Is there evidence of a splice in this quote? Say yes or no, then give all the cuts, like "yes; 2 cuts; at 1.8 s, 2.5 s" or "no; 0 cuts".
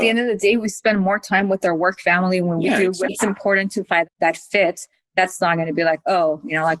yes; 1 cut; at 3.1 s